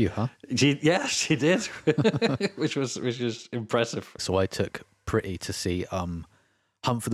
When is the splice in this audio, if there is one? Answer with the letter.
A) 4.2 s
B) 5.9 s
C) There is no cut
A